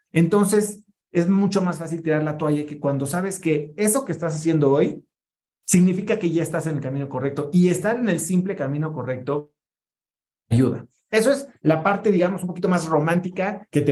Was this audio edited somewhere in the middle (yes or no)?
no